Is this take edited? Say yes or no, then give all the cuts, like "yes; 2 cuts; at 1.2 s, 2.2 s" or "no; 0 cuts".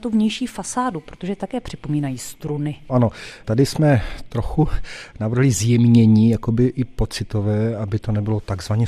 no; 0 cuts